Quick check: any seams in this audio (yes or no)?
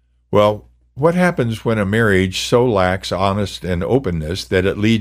no